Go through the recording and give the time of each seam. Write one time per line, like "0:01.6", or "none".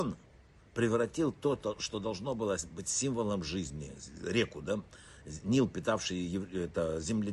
none